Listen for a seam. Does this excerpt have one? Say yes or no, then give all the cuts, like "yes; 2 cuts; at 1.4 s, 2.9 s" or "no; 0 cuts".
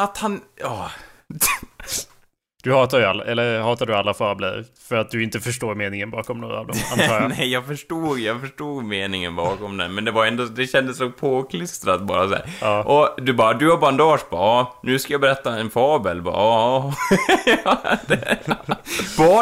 no; 0 cuts